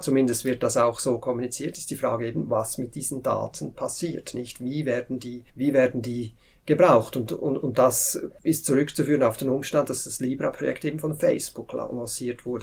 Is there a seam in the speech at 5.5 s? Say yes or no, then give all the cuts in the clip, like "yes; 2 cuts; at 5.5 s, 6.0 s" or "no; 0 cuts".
yes; 1 cut; at 5.5 s